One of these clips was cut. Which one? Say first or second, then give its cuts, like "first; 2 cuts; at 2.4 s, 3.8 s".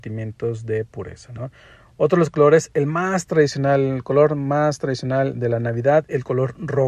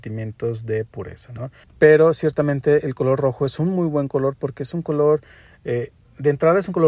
second; 1 cut; at 1.6 s